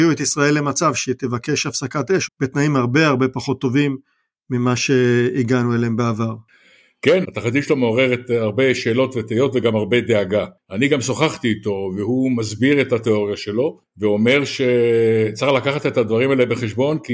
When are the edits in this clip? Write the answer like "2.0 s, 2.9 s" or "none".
2.3 s, 7.2 s